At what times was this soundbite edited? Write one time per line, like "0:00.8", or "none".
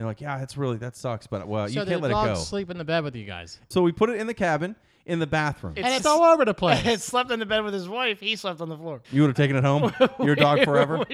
0:03.7
0:06.0
0:09.0